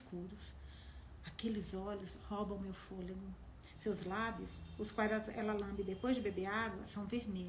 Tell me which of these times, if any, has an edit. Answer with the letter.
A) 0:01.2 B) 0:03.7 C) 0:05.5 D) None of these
B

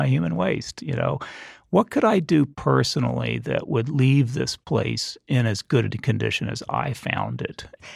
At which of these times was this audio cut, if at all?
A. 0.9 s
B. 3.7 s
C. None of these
C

